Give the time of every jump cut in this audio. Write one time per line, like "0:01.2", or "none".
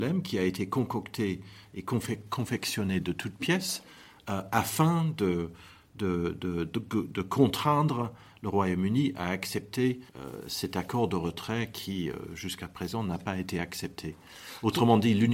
0:10.1

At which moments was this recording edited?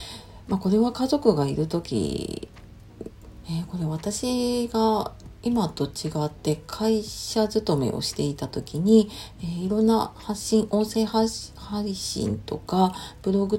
0:03.4

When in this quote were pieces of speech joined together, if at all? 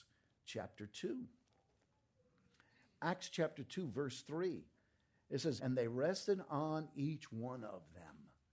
0:05.6

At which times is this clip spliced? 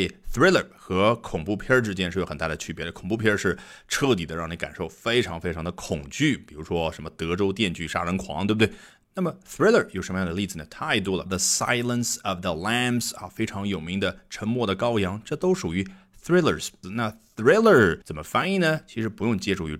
0:11.3
0:16.8
0:18.0

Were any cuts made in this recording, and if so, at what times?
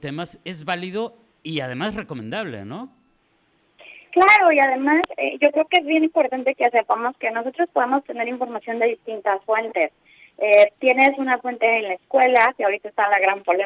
none

